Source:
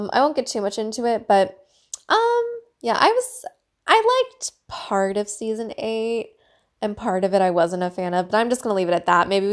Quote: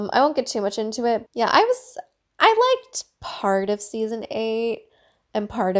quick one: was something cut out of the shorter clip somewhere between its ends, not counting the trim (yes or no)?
yes